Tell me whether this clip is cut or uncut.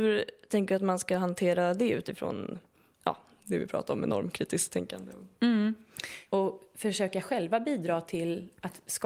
cut